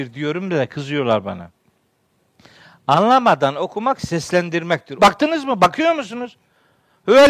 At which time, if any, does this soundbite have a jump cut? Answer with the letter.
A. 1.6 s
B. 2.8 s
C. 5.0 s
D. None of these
C